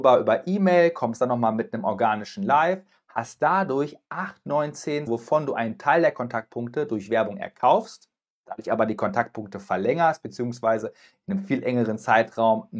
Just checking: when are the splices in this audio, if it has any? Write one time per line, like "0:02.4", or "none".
0:05.1